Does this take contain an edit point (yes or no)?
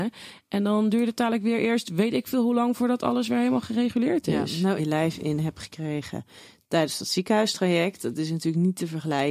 yes